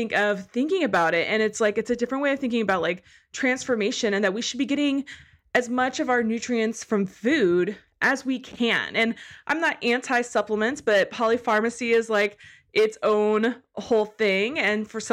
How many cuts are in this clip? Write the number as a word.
zero